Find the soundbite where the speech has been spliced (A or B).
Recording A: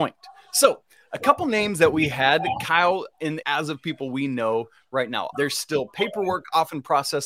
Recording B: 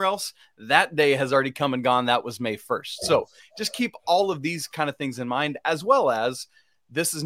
A